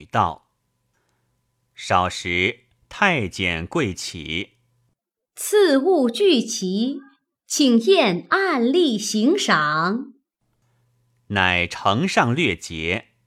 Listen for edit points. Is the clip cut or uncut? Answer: uncut